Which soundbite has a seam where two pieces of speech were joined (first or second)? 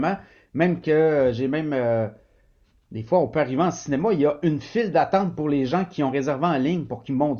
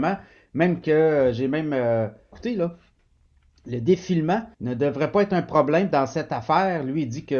second